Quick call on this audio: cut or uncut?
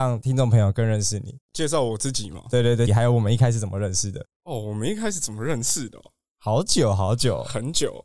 cut